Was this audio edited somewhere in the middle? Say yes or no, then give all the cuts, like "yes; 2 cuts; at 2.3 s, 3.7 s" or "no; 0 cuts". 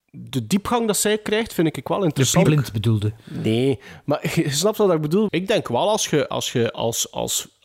yes; 2 cuts; at 2.5 s, 5.3 s